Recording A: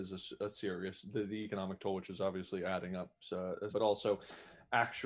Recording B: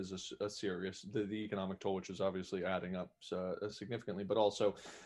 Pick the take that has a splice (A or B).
A